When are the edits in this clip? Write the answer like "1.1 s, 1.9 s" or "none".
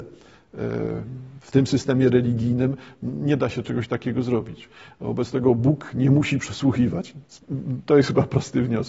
none